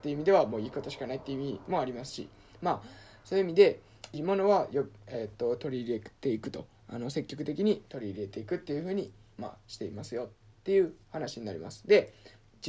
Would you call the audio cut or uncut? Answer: cut